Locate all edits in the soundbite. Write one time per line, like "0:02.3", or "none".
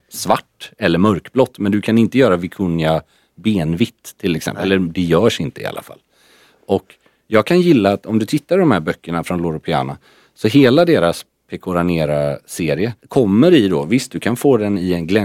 0:13.0